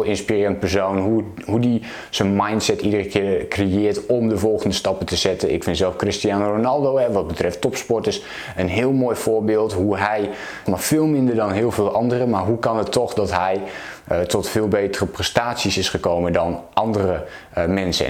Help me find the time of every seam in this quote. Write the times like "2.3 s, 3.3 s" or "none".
10.7 s

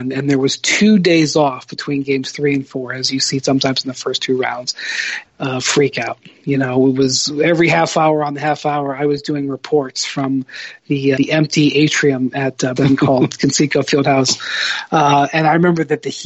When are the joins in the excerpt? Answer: 5.2 s, 11.2 s, 12.8 s

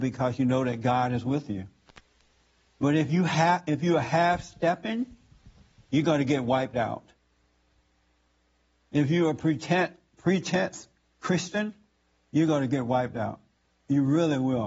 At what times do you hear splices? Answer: none

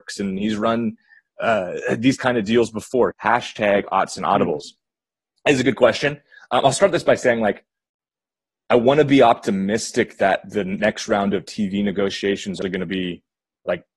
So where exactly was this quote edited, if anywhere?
3.1 s, 12.6 s

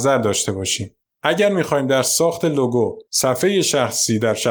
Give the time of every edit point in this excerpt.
1.1 s, 3.1 s

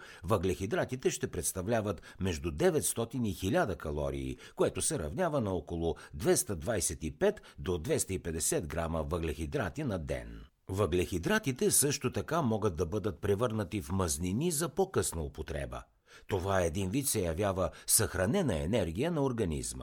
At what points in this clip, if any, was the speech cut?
none

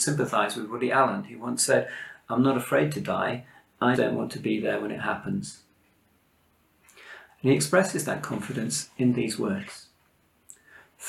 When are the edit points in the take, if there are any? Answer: 3.9 s, 7.3 s

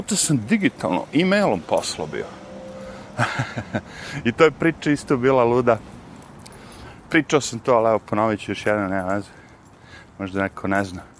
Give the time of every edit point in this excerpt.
none

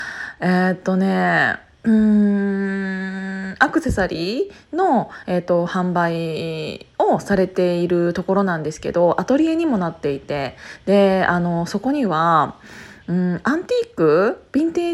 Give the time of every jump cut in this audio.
none

